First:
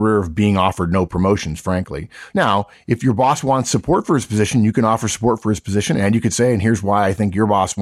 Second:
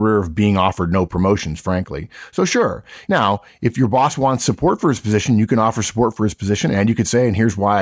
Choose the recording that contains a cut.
first; 1 cut; at 2.3 s

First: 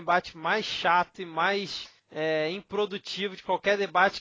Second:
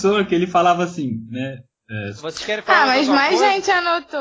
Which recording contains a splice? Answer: second; 1 cut; at 2.2 s

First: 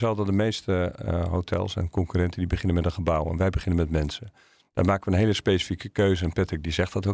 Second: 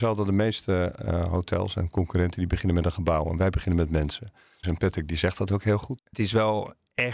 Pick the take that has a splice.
second; 2 cuts; at 4.6 s, 6.0 s

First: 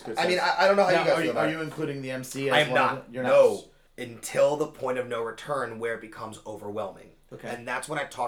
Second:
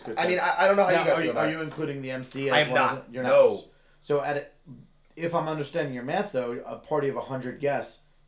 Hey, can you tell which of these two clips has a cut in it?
first; 1 cut; at 3.9 s

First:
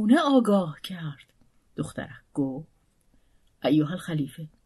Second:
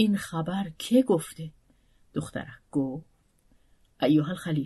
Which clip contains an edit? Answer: first; 1 cut; at 1.7 s

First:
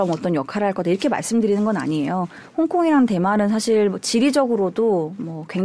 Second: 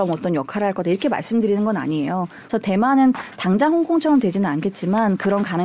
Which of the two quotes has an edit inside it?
second; 1 cut; at 2.5 s

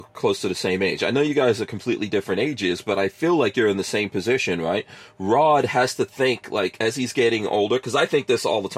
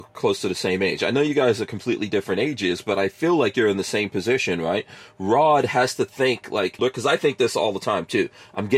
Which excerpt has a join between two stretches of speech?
second; 1 cut; at 6.8 s

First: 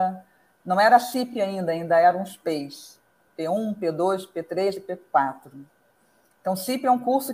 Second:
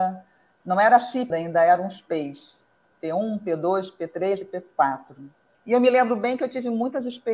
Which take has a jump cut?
second; 2 cuts; at 1.3 s, 5.5 s

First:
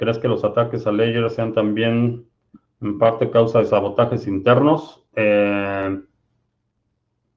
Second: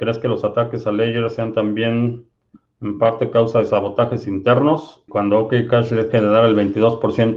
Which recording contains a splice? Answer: second; 1 cut; at 5.1 s

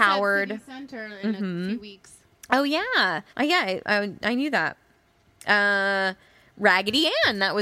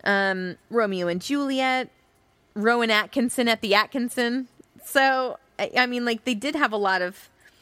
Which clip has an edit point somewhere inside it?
first; 1 cut; at 3.3 s

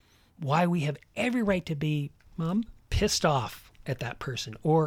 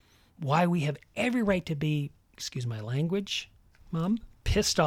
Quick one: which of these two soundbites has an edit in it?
first; 1 cut; at 2.2 s

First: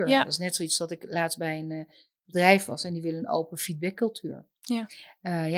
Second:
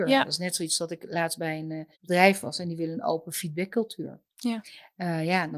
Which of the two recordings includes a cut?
second; 1 cut; at 1.9 s

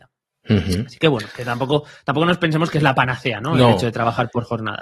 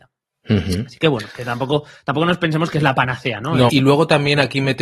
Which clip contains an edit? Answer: second; 1 cut; at 3.7 s

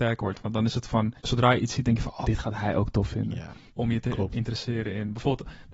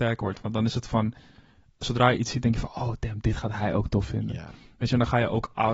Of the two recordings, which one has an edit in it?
first; 3 cuts; at 1.2 s, 2.2 s, 3.7 s

